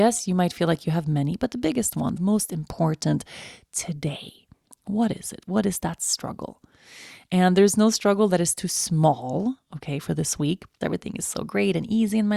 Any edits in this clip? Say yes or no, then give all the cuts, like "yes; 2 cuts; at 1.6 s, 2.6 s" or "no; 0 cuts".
yes; 2 cuts; at 2.2 s, 10.8 s